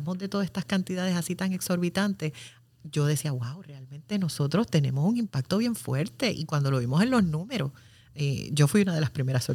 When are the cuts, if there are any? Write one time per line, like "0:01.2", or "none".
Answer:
none